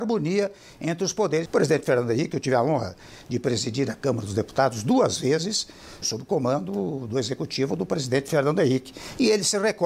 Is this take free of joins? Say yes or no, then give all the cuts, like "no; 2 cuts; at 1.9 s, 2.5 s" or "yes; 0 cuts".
no; 2 cuts; at 1.5 s, 6.0 s